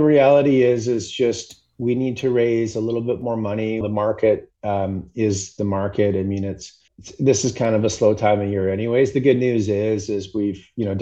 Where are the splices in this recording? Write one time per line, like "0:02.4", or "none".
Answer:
0:03.8
0:06.9